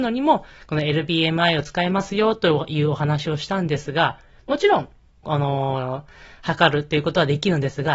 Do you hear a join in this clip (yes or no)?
yes